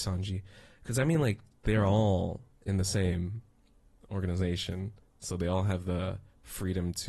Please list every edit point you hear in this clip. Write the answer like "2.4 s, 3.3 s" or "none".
none

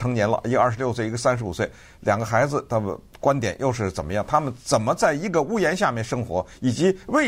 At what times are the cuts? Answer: none

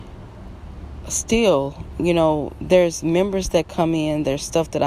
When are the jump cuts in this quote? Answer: none

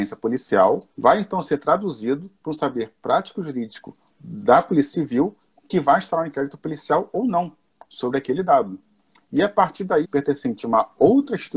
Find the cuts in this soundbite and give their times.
0.9 s, 10.0 s

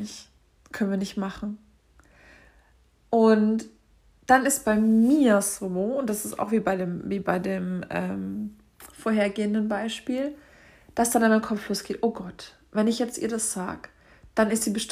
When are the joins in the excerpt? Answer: none

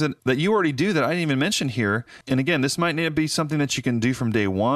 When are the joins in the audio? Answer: 2.2 s

